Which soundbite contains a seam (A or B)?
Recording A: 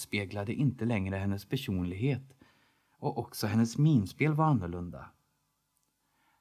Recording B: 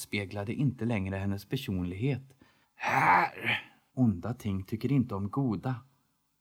B